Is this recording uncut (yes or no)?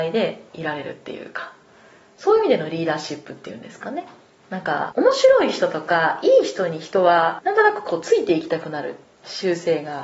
no